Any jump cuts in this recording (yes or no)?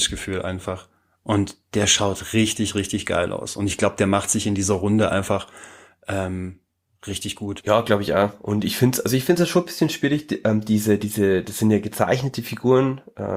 no